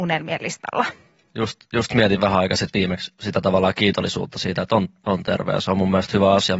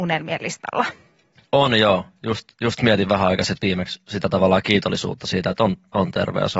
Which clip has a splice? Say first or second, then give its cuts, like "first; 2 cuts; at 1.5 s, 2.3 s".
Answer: first; 1 cut; at 1.3 s